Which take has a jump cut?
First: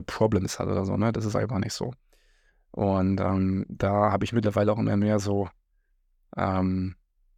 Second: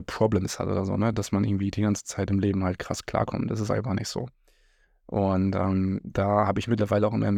first; 1 cut; at 1.1 s

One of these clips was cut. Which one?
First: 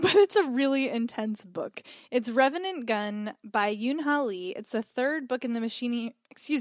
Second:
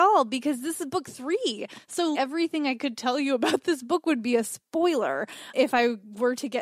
second; 2 cuts; at 2.1 s, 5.5 s

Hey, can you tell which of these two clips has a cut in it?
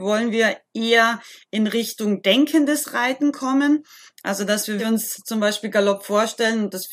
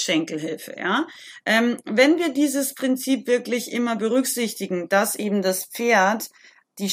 first; 1 cut; at 4.8 s

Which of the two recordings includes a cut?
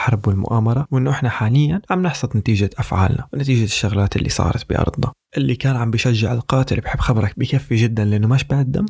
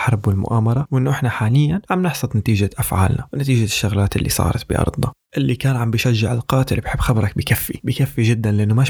first; 1 cut; at 7.3 s

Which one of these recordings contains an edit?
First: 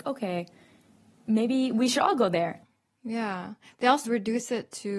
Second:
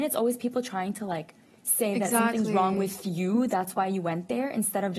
first; 1 cut; at 4.0 s

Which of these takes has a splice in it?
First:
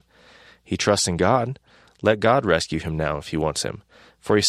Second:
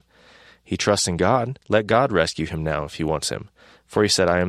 second; 1 cut; at 1.6 s

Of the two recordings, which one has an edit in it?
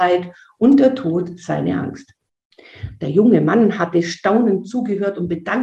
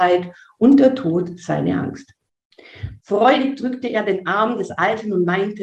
second; 1 cut; at 3.0 s

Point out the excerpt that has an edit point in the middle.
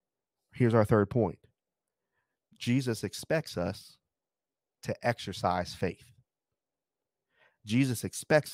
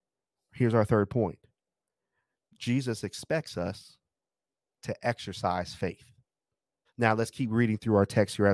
second; 1 cut; at 6.8 s

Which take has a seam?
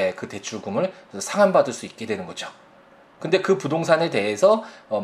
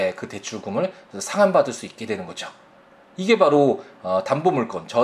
first; 1 cut; at 3.1 s

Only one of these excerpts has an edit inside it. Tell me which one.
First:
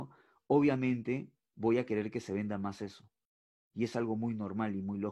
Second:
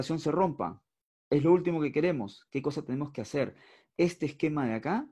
second; 1 cut; at 2.5 s

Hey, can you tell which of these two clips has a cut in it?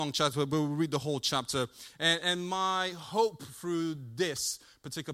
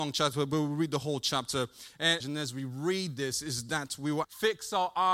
second; 2 cuts; at 2.2 s, 4.2 s

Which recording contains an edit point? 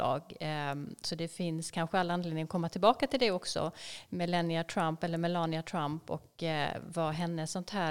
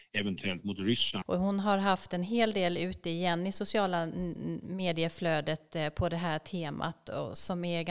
second; 1 cut; at 1.2 s

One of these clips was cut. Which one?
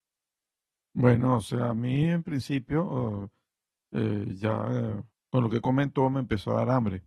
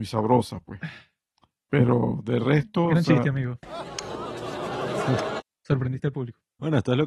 first; 1 cut; at 5.1 s

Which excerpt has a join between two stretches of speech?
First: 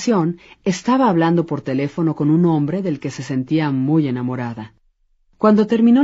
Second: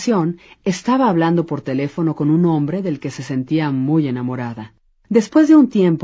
second; 1 cut; at 4.9 s

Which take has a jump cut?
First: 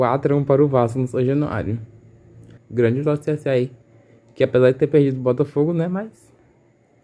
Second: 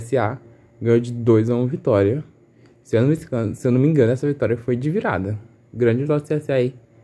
first; 1 cut; at 2.6 s

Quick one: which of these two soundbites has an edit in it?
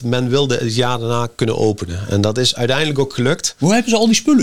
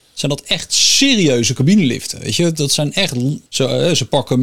second; 1 cut; at 3.5 s

